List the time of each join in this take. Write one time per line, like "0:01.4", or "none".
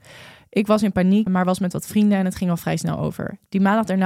0:01.3